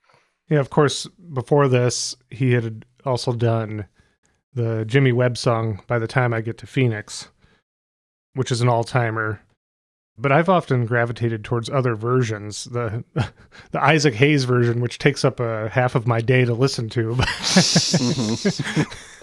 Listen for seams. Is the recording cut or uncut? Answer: uncut